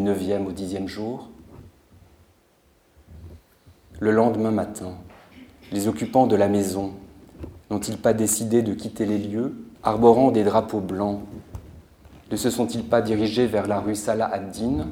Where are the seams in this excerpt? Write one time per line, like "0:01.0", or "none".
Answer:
0:07.6
0:09.8